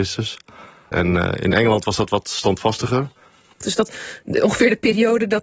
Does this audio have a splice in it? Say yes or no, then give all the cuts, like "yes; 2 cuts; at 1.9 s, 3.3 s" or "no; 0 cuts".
yes; 2 cuts; at 0.9 s, 3.6 s